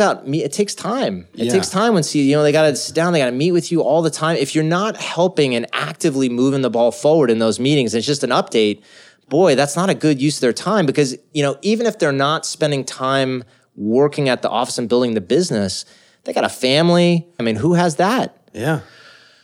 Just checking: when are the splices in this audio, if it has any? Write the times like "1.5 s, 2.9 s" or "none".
17.4 s